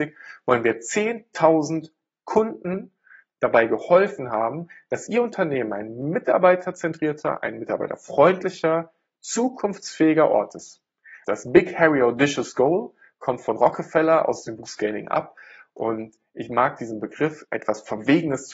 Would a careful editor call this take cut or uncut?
cut